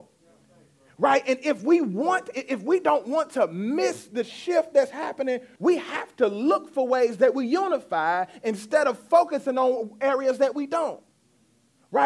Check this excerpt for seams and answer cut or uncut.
cut